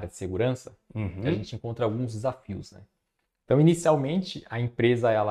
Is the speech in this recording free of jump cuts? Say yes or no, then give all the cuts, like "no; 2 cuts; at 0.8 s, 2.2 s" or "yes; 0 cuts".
yes; 0 cuts